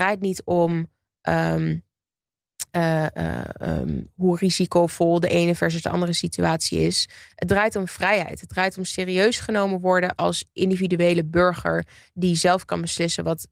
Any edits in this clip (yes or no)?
no